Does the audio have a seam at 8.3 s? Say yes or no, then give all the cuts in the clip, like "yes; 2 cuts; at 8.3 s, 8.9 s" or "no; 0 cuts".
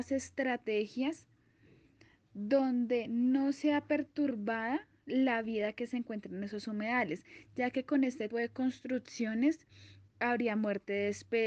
yes; 1 cut; at 8.3 s